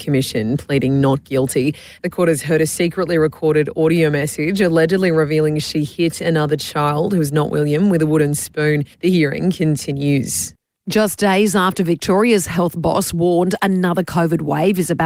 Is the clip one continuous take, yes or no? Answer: no